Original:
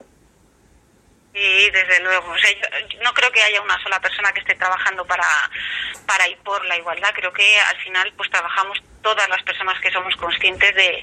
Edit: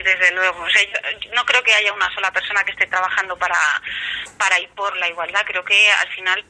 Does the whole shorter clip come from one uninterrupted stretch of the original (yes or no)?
yes